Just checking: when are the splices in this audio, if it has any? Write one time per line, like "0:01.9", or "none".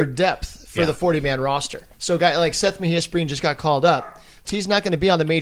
0:01.9
0:04.4